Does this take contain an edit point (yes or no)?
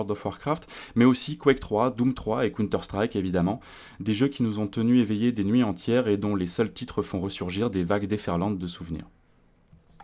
no